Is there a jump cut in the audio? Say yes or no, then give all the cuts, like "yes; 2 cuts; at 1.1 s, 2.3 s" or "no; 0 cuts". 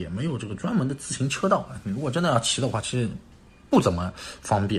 no; 0 cuts